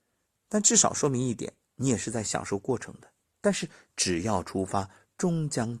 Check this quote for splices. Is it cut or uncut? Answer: cut